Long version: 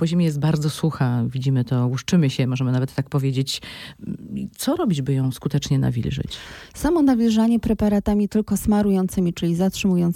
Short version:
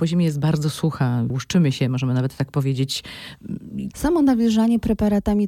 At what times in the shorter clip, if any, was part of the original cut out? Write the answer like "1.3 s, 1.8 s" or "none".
1.3 s, 3.9 s